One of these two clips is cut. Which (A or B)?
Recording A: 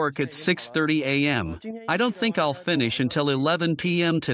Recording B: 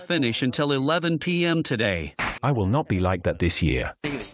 B